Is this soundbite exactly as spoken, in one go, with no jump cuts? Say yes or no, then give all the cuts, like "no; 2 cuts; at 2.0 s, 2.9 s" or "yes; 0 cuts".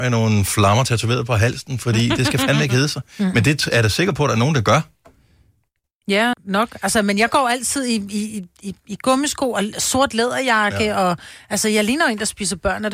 no; 1 cut; at 6.3 s